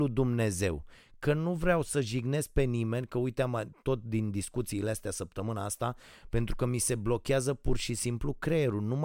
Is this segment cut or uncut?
uncut